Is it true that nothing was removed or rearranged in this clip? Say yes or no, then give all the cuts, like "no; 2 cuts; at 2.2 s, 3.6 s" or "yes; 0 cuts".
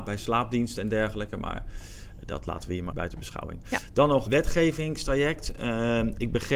no; 1 cut; at 2.9 s